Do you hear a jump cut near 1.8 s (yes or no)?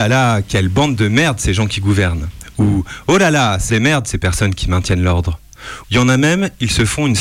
no